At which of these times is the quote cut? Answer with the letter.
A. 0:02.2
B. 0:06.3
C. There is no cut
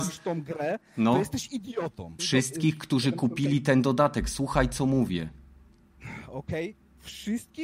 A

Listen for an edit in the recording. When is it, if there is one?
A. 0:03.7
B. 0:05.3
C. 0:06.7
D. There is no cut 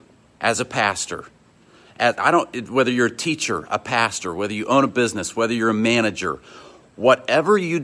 D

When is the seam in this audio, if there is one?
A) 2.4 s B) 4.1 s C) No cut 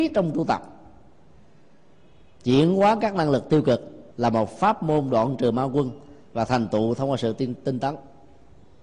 B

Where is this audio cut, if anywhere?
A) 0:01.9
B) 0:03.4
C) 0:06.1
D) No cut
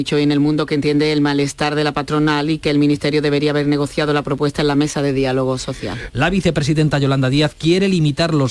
C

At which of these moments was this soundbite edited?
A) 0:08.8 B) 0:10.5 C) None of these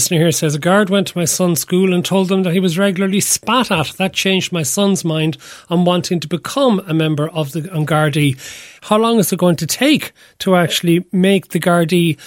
A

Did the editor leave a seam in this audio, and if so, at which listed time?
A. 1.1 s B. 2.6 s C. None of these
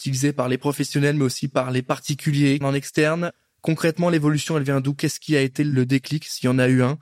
B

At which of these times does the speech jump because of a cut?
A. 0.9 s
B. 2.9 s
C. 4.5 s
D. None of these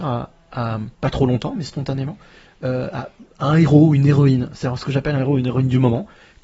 A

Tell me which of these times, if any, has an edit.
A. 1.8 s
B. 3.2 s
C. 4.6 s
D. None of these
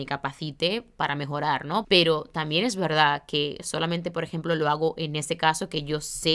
A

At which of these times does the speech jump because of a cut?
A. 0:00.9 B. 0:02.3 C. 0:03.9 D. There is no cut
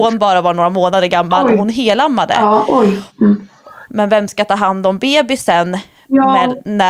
C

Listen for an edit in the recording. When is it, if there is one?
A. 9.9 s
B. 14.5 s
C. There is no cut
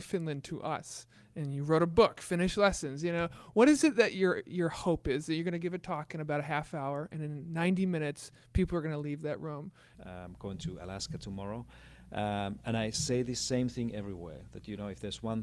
A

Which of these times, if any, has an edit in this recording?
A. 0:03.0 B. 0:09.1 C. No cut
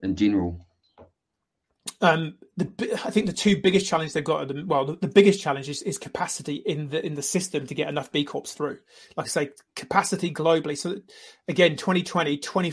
C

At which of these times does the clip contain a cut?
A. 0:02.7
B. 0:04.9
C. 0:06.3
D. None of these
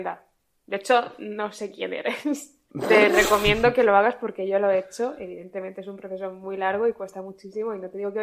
A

